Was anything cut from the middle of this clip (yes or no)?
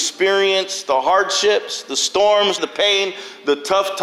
yes